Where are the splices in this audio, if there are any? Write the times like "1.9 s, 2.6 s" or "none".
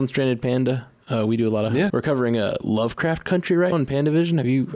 1.9 s, 3.7 s